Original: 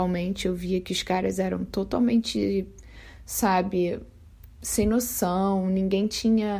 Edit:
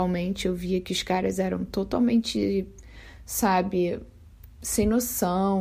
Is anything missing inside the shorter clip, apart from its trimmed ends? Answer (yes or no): no